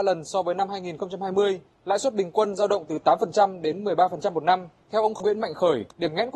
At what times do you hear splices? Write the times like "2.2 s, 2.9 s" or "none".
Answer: 4.8 s